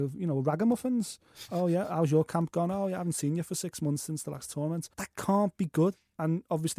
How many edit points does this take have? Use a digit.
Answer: 1